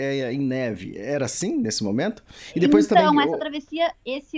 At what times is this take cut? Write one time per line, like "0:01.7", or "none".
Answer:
none